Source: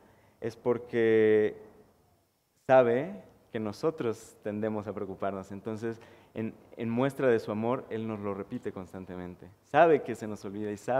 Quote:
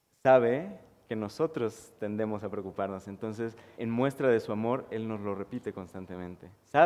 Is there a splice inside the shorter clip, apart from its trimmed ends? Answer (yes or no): yes